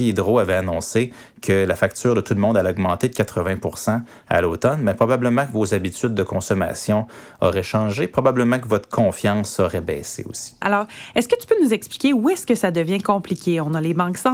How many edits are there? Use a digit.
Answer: 1